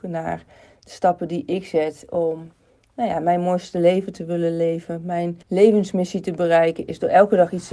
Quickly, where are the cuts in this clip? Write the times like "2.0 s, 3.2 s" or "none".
5.4 s